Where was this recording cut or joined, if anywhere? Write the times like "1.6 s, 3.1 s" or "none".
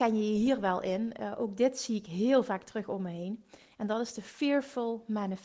none